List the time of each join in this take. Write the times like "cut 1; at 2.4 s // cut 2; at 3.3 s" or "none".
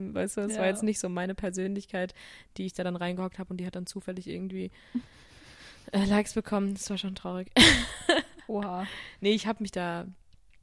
none